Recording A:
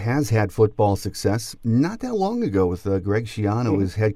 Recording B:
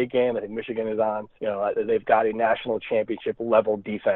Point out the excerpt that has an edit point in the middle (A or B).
B